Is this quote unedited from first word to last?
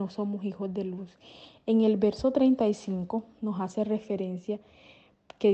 yes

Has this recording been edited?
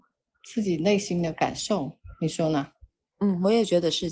no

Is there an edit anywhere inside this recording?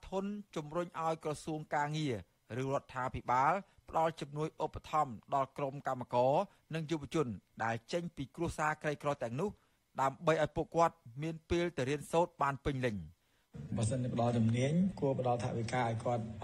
no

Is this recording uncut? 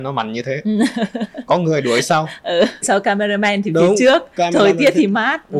no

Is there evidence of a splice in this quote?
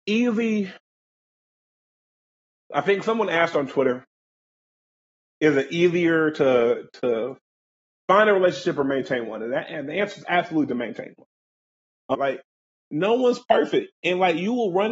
yes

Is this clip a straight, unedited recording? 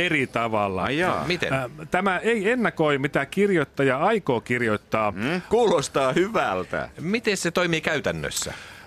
no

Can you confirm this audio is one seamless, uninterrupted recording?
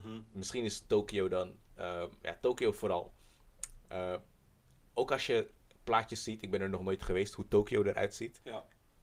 no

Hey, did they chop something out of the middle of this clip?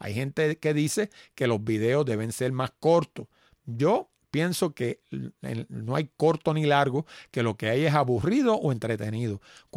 yes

